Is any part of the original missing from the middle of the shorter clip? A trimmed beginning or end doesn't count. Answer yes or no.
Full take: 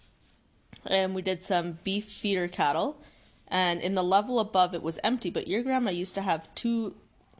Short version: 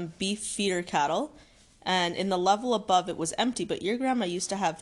no